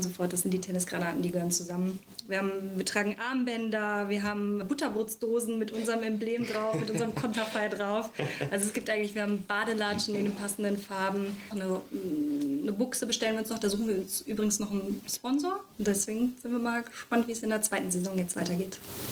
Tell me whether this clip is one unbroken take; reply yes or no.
no